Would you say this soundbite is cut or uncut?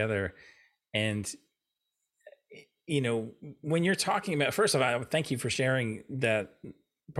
uncut